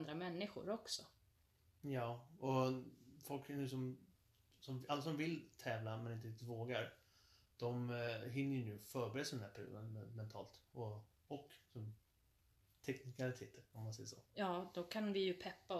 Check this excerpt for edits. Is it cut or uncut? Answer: uncut